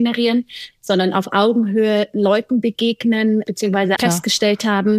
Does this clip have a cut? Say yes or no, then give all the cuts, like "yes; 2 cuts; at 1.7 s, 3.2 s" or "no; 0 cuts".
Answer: yes; 1 cut; at 4.0 s